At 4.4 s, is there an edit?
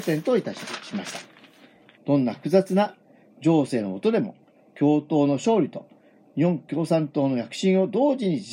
no; 1 cut; at 1.9 s

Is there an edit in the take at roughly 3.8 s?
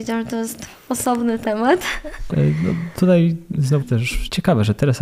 yes; 2 cuts; at 2.3 s, 3.8 s

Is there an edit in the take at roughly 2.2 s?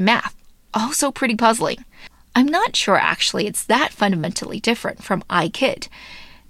no; 0 cuts

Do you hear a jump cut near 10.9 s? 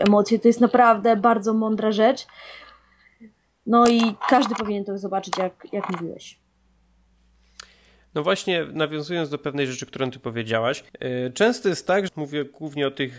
yes; 2 cuts; at 10.9 s, 12.1 s

